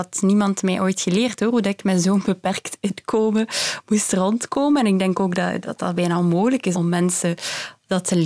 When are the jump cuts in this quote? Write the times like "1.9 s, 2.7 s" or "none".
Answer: 5.6 s, 6.7 s